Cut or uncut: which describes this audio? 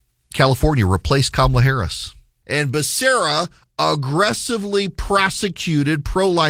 cut